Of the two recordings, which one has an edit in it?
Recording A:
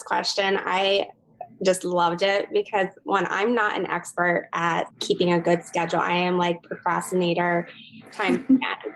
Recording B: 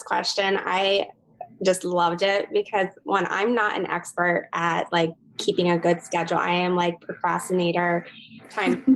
A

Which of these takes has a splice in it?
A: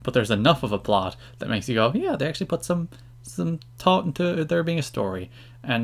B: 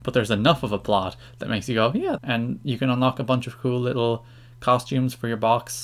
B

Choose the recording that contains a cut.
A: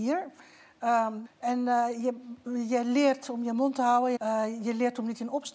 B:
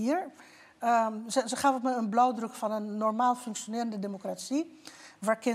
A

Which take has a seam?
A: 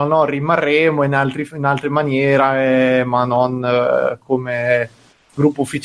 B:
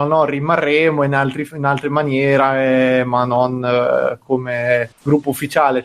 B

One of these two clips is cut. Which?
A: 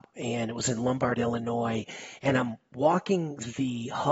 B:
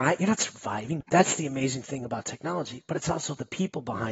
B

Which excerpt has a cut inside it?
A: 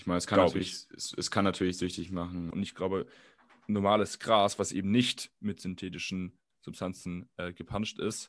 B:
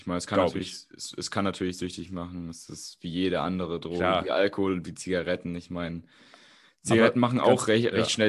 A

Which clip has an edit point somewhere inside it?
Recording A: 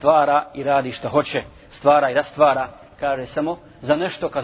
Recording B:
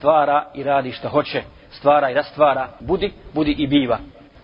B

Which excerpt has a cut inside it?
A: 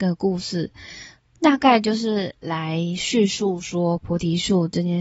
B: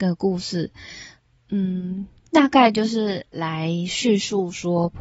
A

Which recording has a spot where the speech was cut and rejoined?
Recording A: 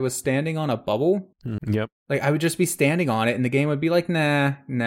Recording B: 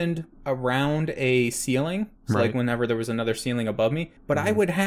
A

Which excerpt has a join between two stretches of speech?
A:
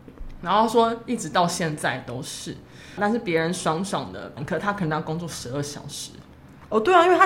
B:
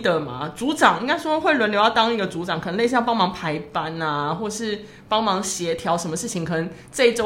A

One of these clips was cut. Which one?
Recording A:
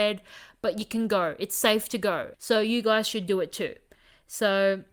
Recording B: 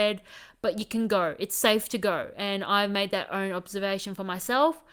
A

